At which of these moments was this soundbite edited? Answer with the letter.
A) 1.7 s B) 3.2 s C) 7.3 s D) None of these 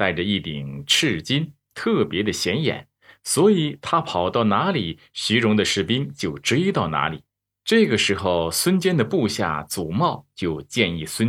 D